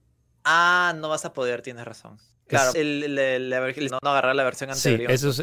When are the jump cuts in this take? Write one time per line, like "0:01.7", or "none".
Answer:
0:02.7
0:03.9